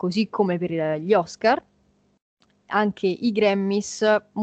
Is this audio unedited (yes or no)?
yes